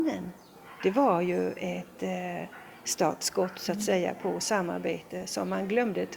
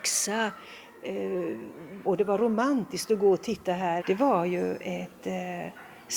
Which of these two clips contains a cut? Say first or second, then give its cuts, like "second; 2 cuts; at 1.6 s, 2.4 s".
second; 2 cuts; at 2.1 s, 4.0 s